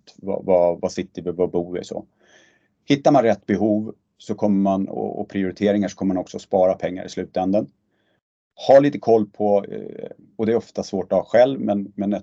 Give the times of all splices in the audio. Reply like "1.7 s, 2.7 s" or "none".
none